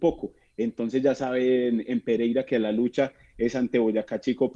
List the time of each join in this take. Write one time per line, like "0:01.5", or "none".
none